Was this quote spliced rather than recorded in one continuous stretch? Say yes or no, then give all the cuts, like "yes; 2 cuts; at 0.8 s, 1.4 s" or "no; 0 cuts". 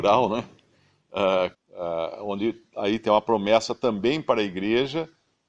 yes; 1 cut; at 1.5 s